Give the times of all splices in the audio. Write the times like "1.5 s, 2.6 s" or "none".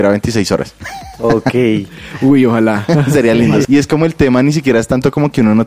3.6 s